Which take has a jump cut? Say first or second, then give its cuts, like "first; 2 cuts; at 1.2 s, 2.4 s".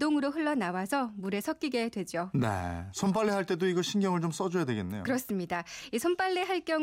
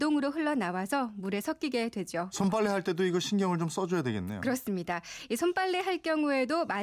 second; 1 cut; at 2.3 s